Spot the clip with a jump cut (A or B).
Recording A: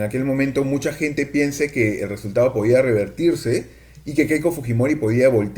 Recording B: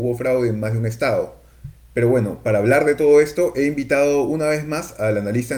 B